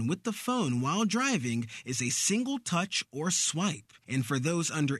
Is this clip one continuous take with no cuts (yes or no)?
yes